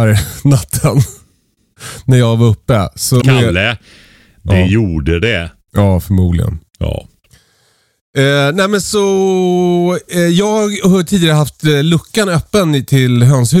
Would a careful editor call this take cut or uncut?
cut